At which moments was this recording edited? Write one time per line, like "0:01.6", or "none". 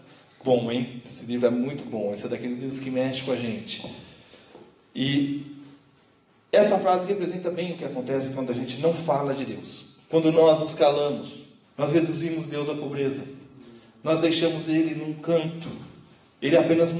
0:10.0
0:11.6